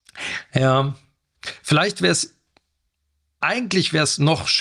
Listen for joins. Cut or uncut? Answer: cut